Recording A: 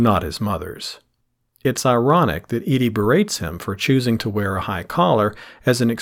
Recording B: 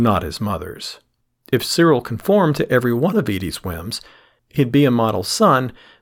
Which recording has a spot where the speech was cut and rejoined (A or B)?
B